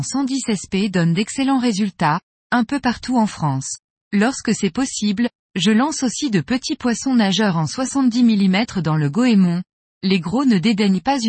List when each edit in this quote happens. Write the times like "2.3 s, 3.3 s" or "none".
4.0 s